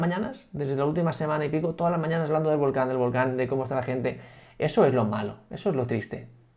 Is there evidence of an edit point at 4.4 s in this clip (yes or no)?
no